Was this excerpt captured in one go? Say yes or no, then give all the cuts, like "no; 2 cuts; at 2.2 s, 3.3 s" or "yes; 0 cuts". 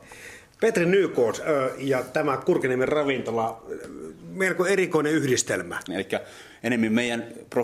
no; 1 cut; at 5.9 s